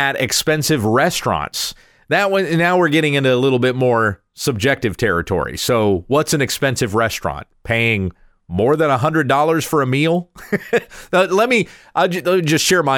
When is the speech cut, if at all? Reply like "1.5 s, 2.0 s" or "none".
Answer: none